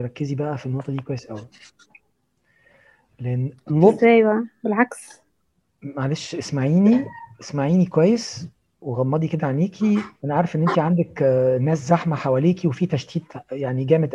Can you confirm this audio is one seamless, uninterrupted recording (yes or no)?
yes